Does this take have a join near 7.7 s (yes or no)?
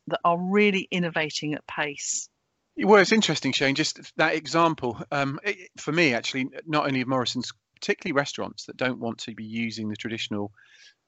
yes